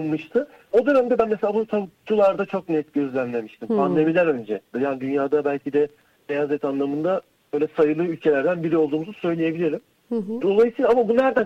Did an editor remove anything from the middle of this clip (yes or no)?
yes